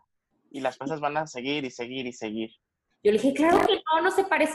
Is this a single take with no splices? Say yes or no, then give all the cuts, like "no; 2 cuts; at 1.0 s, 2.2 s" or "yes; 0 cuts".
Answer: no; 1 cut; at 2.9 s